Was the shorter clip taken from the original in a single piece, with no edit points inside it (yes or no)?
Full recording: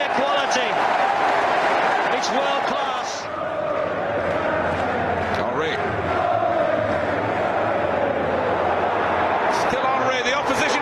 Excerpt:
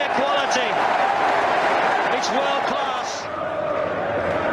yes